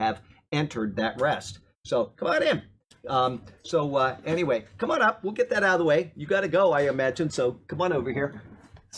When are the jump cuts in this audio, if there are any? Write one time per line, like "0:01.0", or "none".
none